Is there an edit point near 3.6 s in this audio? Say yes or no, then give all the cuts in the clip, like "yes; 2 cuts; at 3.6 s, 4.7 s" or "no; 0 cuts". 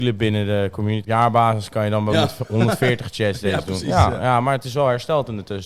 no; 2 cuts; at 1.0 s, 2.1 s